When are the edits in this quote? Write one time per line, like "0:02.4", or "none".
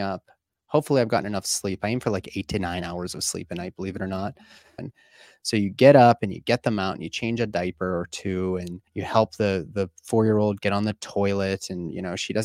0:04.8
0:08.9